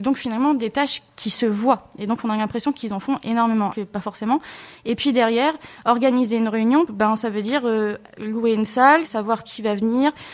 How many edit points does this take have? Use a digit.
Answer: 3